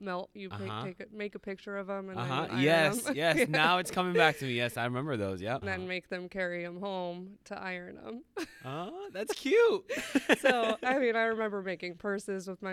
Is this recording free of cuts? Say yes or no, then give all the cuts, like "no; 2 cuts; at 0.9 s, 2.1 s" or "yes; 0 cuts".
no; 1 cut; at 5.6 s